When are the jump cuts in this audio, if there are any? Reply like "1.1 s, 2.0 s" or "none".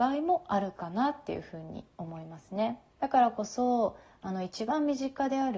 2.9 s